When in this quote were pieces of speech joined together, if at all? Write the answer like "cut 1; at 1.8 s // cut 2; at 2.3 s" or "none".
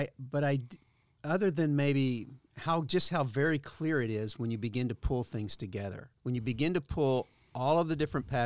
cut 1; at 6.2 s